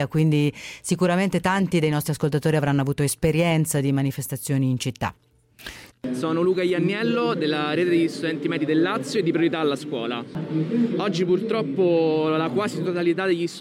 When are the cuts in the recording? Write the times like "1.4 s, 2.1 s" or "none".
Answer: 5.9 s

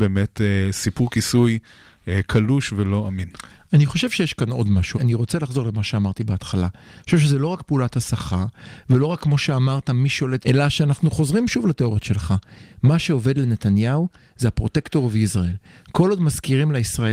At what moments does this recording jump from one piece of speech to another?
4.9 s, 10.4 s

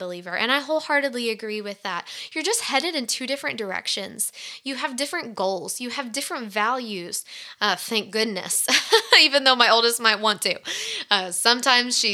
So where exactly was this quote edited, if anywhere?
7.6 s

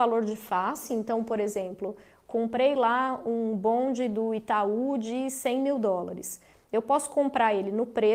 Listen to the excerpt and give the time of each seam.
none

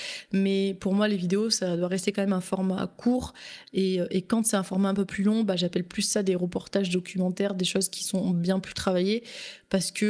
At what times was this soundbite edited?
none

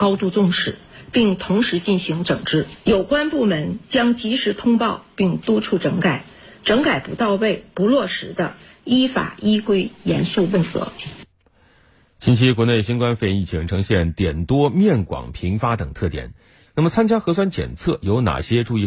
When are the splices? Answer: 16.7 s

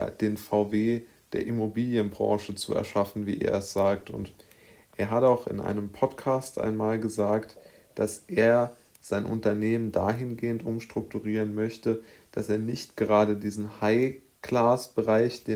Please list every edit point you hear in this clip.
none

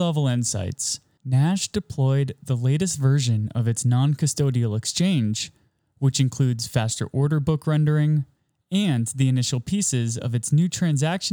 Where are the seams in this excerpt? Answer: 1.2 s

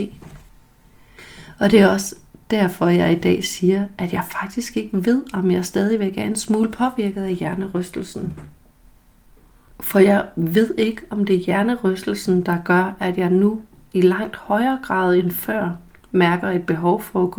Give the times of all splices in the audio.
none

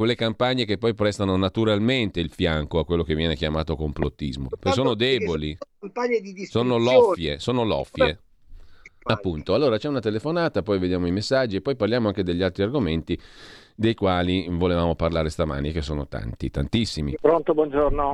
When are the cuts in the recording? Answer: 4.5 s, 9.1 s, 17.2 s

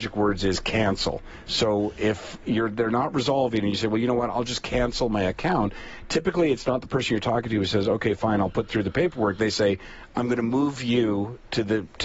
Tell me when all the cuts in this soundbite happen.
none

